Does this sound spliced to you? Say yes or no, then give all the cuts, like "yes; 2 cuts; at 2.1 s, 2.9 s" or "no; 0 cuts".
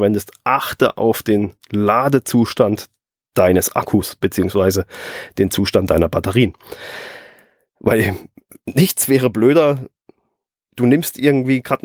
no; 0 cuts